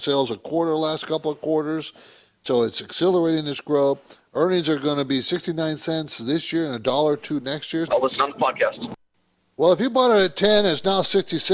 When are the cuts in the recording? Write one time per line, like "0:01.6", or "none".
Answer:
0:07.9

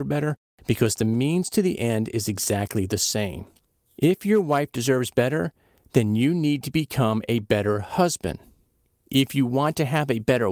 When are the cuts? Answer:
none

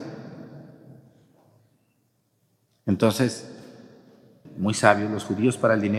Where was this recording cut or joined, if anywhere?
0:04.5

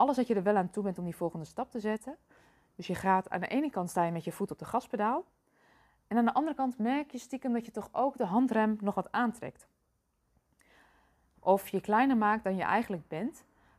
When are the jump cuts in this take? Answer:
0:11.3

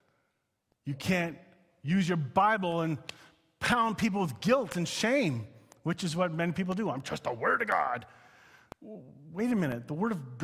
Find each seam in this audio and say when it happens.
none

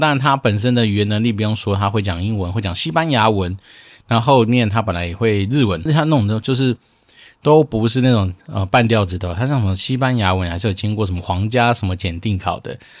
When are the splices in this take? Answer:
0:05.9

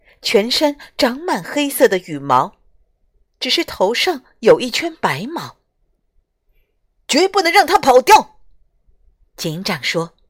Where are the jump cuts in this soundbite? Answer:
0:09.2

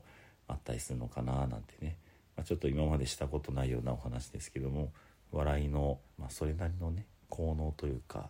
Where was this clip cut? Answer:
0:06.2

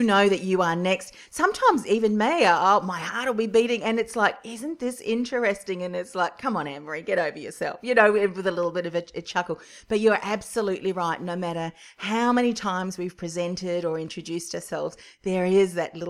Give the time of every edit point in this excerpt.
none

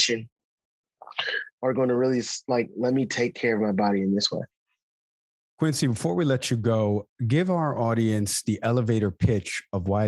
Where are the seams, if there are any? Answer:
none

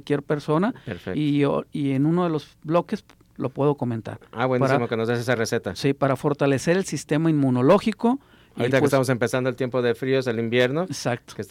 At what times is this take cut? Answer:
none

